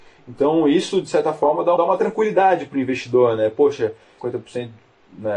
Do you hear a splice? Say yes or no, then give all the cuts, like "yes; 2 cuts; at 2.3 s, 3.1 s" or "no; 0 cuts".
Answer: yes; 2 cuts; at 1.8 s, 4.2 s